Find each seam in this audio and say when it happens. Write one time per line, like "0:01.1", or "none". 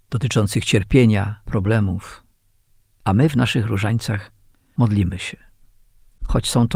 0:01.4

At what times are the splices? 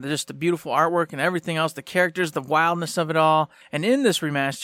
0:03.6

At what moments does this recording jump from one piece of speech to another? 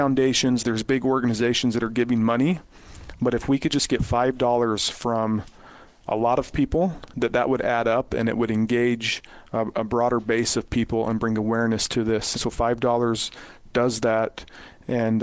0:12.3

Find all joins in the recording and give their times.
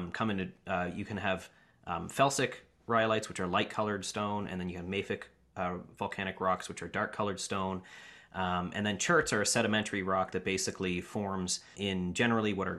0:11.7

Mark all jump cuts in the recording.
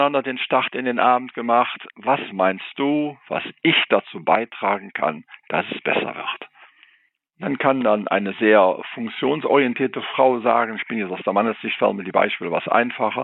none

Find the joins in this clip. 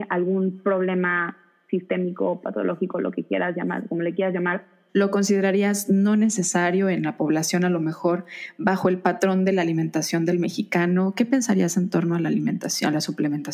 0:04.9

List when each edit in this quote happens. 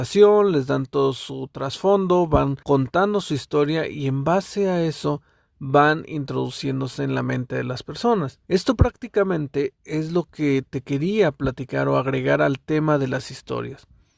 0:02.6
0:08.4

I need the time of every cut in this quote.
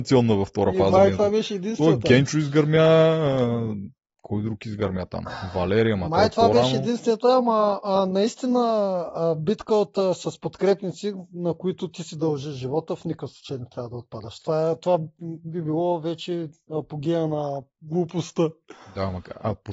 none

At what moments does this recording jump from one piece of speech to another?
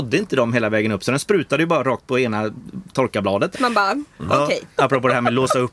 0:03.5
0:04.8

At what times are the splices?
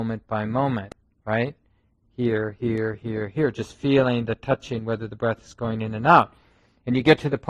none

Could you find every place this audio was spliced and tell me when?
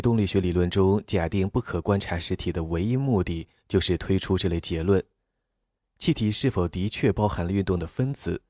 none

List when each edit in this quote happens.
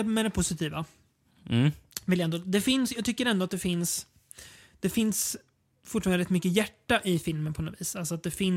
none

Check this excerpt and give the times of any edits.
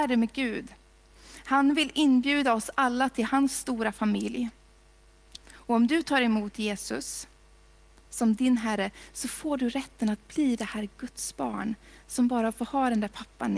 0:05.4

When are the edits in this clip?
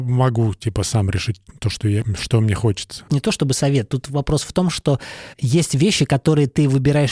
0:03.1

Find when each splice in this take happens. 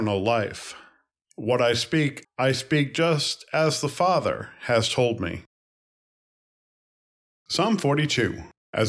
0:02.2

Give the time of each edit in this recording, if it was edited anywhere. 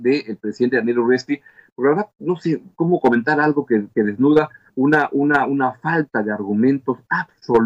none

